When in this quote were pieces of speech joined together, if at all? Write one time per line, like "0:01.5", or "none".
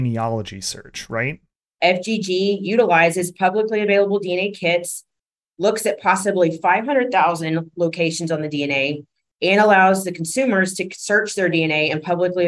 0:01.6